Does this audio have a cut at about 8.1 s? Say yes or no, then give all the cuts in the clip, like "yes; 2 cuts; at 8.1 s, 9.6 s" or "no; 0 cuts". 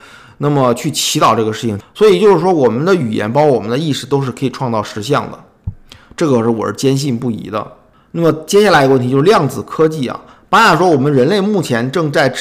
no; 1 cut; at 1.8 s